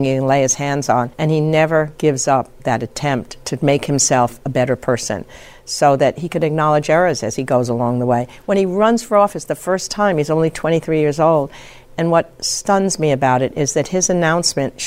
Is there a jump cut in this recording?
yes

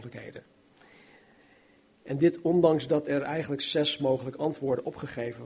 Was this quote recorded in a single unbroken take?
yes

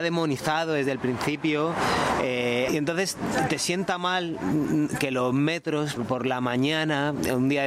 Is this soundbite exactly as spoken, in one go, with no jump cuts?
no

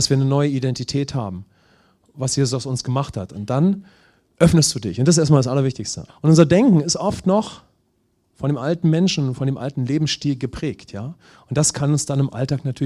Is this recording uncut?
no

